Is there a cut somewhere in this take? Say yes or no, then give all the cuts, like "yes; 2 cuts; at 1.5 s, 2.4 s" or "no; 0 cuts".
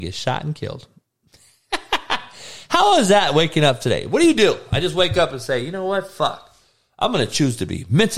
no; 0 cuts